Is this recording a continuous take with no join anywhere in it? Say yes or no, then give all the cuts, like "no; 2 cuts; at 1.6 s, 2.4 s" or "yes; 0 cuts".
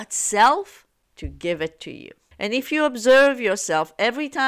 no; 1 cut; at 2.3 s